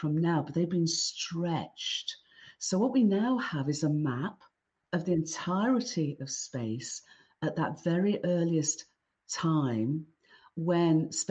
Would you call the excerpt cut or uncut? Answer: uncut